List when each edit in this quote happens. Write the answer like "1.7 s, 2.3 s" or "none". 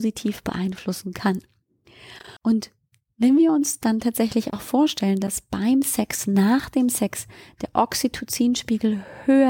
2.4 s